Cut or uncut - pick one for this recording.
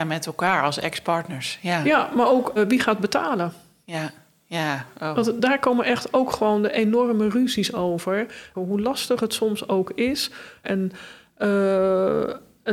cut